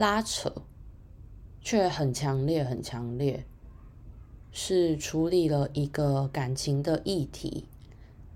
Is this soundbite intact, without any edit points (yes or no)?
no